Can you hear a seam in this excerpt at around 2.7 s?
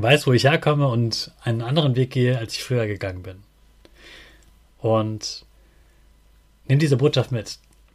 no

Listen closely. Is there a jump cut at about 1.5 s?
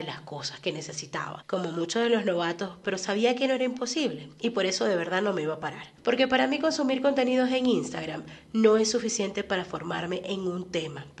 no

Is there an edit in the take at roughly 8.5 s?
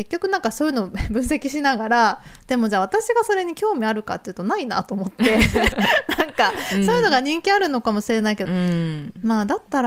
yes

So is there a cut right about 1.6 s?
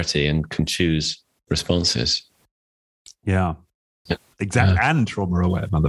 no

